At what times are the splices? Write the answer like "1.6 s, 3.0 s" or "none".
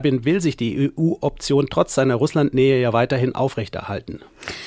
none